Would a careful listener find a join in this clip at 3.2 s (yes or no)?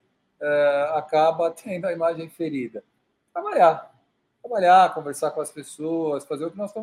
no